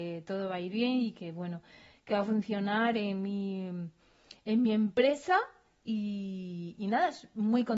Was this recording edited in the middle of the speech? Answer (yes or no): no